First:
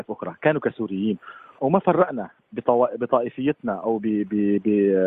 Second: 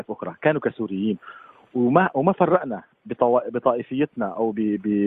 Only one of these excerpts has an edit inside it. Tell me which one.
first; 1 cut; at 1.6 s

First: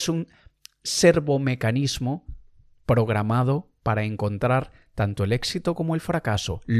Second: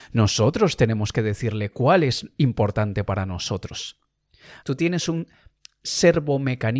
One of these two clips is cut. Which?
second; 1 cut; at 4.6 s

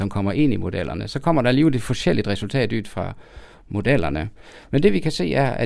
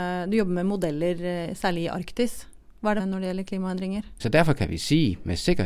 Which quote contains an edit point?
second; 2 cuts; at 3.0 s, 4.2 s

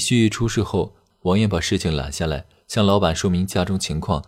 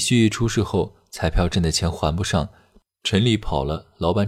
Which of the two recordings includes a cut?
first; 1 cut; at 1.1 s

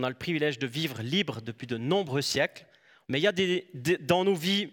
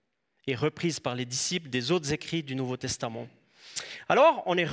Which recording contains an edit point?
first; 1 cut; at 3.0 s

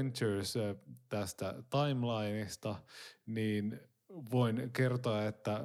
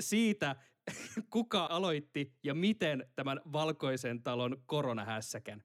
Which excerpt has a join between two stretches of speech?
second; 1 cut; at 1.7 s

